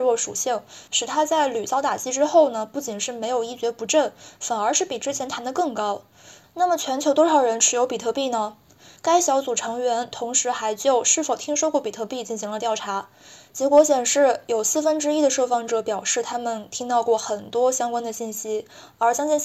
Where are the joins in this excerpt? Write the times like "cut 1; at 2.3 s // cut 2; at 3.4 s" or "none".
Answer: cut 1; at 6.4 s // cut 2; at 9.0 s